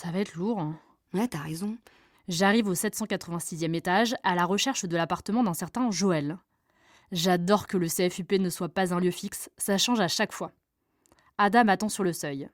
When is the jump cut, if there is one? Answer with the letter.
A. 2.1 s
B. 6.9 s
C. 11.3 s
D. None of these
A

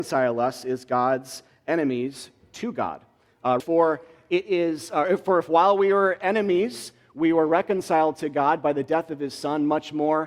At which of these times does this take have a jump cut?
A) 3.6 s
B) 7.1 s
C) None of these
A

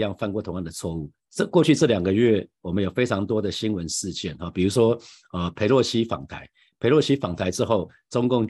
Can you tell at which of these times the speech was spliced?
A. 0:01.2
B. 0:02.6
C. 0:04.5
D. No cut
A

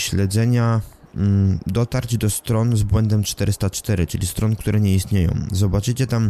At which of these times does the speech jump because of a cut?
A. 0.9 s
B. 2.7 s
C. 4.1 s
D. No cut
D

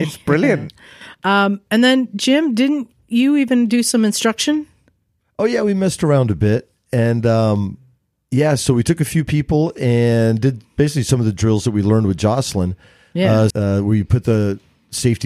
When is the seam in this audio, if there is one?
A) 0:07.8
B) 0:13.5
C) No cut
B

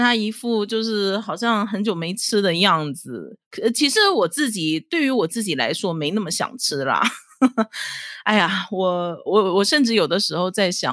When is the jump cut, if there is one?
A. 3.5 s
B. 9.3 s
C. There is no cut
B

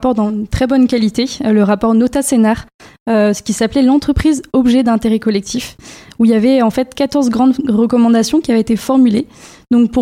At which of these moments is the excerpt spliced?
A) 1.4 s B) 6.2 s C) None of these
C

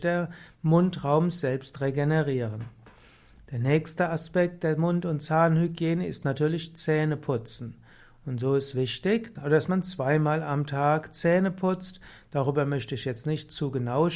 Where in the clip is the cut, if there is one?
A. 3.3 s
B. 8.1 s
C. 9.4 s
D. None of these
C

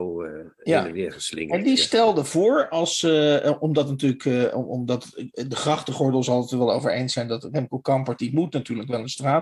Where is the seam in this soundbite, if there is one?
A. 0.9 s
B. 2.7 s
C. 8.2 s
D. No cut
D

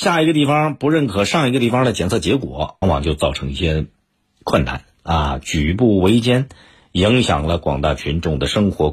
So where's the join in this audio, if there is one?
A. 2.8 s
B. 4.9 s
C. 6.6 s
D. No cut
A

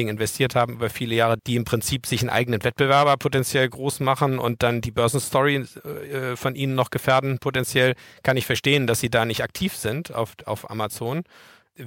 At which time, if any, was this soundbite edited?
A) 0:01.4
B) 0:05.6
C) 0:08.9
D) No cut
A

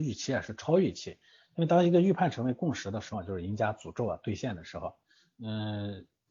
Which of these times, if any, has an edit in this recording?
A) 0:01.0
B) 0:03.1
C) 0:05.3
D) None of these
B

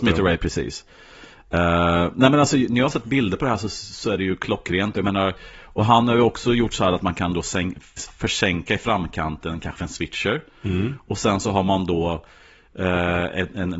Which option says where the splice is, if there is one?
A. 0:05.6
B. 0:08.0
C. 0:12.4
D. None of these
B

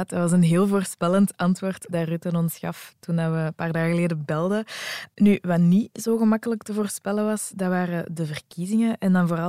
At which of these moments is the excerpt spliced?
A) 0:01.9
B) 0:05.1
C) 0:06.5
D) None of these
A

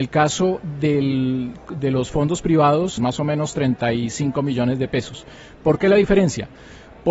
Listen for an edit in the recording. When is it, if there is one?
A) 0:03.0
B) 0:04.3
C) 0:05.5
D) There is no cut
A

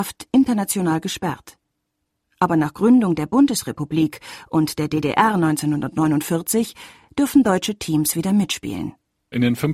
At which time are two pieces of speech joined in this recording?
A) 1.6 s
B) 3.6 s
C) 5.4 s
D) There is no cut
D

